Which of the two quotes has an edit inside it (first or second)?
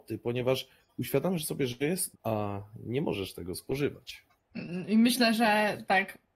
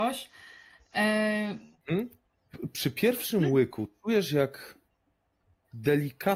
first